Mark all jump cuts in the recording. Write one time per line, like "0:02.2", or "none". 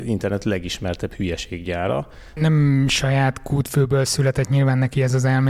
0:02.4